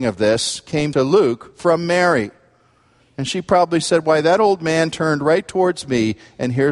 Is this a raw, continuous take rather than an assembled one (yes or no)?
yes